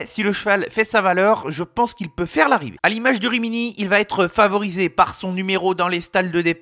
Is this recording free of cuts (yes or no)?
no